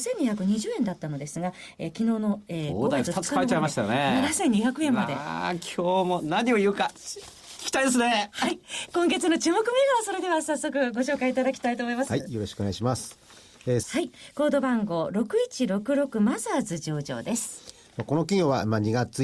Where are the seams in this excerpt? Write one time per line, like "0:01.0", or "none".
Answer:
0:12.1
0:13.8